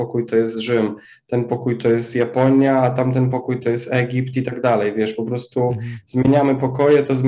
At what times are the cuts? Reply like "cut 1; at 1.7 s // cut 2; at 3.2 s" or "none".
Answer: none